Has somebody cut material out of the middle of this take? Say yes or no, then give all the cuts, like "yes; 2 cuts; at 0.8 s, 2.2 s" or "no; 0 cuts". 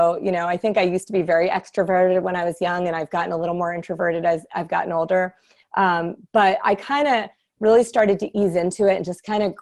no; 0 cuts